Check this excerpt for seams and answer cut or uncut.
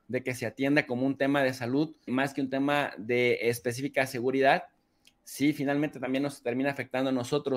cut